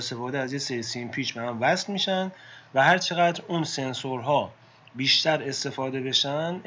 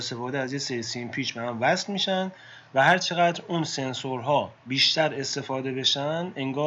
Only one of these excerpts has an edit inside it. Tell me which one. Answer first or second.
second